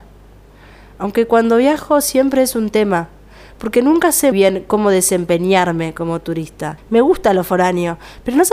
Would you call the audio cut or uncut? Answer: cut